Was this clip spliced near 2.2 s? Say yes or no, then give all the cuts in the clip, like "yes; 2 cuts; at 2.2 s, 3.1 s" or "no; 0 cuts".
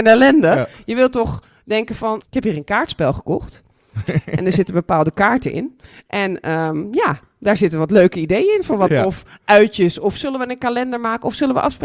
yes; 2 cuts; at 2.2 s, 8.9 s